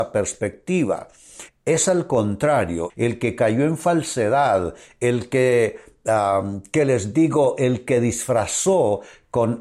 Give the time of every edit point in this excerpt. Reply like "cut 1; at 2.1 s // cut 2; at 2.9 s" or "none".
cut 1; at 1.5 s // cut 2; at 2.9 s